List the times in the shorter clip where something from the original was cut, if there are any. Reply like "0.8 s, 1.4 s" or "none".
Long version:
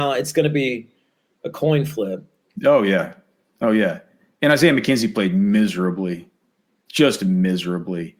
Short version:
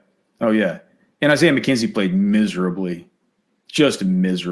none